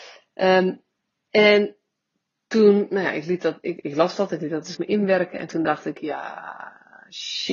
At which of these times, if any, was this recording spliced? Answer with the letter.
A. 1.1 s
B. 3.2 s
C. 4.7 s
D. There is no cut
C